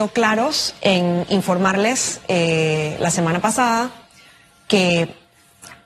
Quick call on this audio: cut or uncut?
uncut